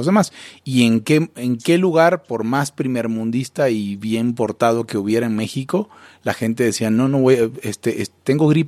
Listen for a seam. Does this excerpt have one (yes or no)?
no